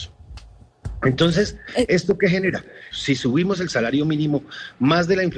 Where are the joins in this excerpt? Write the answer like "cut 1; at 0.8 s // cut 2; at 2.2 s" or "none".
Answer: cut 1; at 2.9 s